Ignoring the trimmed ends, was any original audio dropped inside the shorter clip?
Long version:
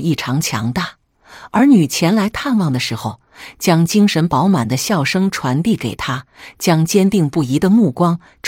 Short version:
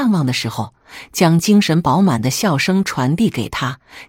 no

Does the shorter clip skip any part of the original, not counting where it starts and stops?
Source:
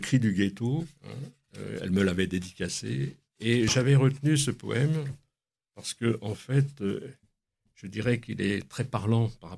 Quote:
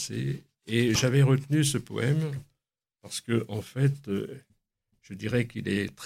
no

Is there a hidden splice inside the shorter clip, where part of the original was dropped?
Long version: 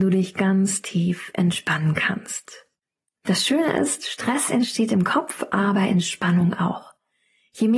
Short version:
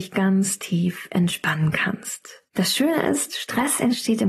yes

